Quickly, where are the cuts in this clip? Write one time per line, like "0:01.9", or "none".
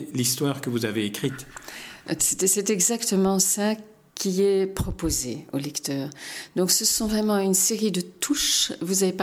0:02.2